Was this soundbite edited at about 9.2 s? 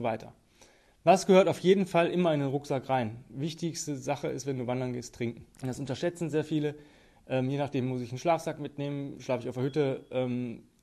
no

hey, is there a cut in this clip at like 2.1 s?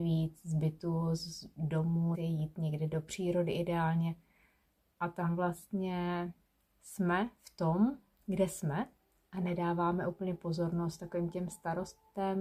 yes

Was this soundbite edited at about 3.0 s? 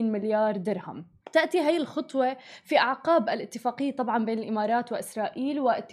no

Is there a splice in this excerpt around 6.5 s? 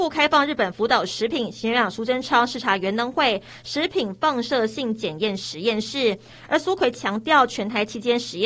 no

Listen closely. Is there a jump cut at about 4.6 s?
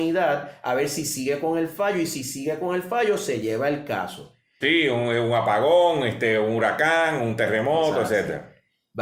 yes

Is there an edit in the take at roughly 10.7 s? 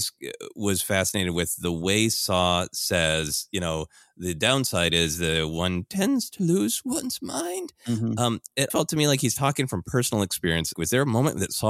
yes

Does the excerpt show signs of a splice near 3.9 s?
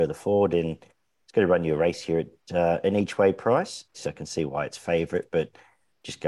yes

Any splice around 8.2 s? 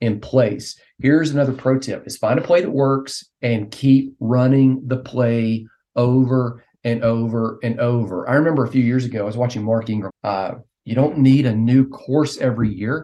no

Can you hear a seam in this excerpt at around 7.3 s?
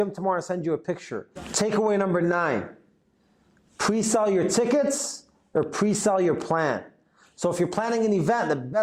no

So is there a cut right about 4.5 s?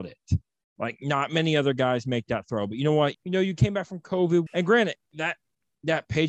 yes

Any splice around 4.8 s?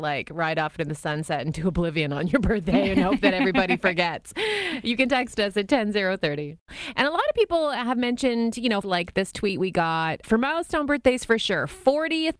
no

